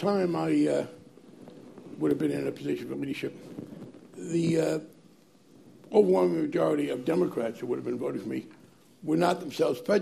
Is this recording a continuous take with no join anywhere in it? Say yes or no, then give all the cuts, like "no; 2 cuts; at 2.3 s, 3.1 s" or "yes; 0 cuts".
yes; 0 cuts